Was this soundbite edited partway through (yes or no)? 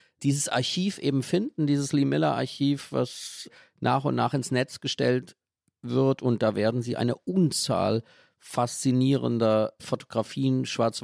no